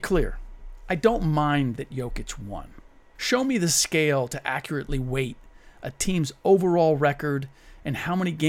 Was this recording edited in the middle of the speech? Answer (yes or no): yes